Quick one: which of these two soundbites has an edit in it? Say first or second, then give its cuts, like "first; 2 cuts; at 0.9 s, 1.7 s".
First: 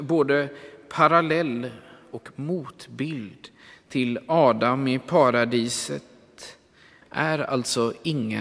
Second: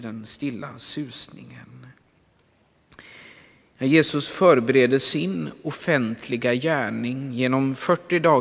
first; 1 cut; at 7.0 s